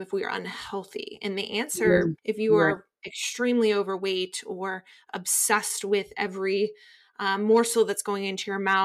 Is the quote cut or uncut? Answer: cut